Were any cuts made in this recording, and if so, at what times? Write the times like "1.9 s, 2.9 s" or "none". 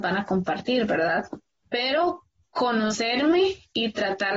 1.6 s